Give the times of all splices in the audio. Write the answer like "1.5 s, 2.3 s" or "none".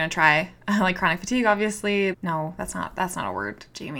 2.1 s